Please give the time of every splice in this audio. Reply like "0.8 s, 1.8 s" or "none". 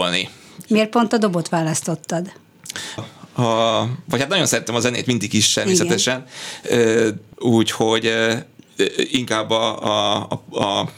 3.0 s, 7.3 s